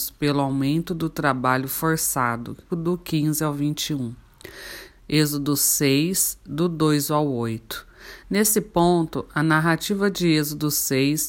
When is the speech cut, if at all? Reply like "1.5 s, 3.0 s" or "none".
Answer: 2.7 s, 4.9 s, 8.2 s